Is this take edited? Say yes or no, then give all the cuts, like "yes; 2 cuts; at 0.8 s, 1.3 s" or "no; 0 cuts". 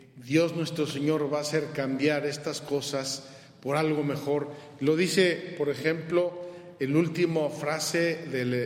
no; 0 cuts